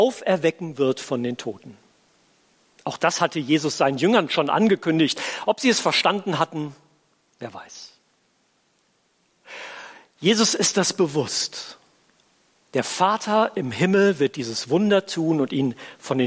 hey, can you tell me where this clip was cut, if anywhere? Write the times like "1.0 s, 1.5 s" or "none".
none